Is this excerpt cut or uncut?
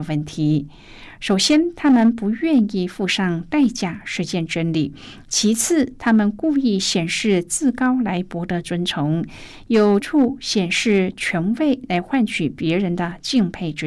cut